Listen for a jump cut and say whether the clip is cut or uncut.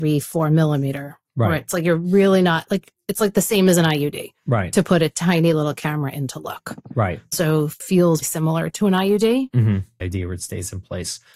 cut